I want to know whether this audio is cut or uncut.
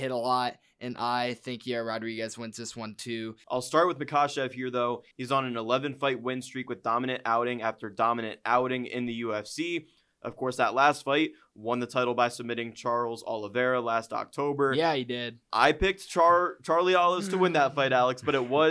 cut